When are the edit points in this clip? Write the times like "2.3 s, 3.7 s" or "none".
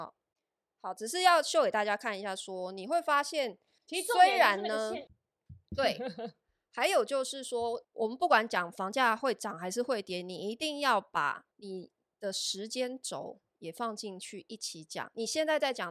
5.1 s, 7.8 s, 11.5 s